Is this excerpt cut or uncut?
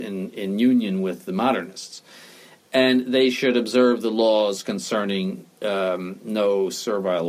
uncut